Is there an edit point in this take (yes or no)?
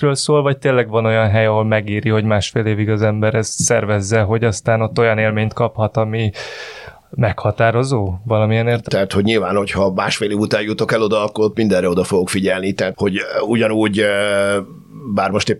yes